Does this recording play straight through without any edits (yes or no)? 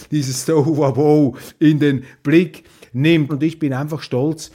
no